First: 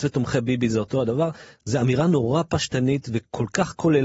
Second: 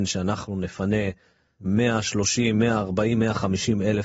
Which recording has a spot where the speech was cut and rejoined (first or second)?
second